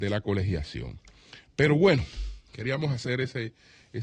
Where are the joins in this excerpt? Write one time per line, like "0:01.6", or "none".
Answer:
none